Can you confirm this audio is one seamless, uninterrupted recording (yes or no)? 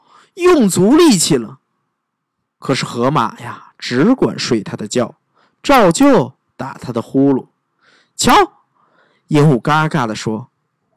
yes